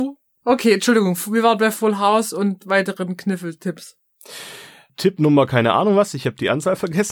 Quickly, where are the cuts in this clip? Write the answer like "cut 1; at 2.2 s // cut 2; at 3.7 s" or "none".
none